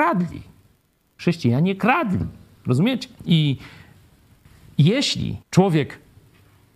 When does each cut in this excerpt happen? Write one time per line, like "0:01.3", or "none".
0:03.2
0:05.4